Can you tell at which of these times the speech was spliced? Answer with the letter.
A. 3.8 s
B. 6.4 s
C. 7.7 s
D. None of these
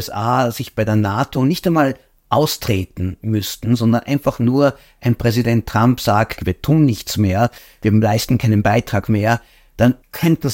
B